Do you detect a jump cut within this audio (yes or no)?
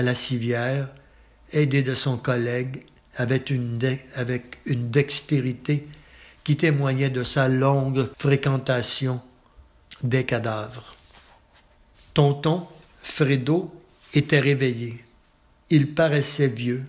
no